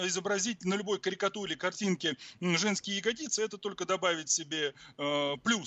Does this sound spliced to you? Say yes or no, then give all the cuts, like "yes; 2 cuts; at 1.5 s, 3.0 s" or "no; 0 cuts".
no; 0 cuts